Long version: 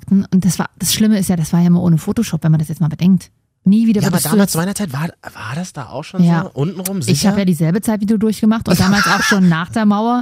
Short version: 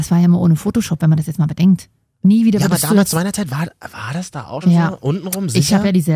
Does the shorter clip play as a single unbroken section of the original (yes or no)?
no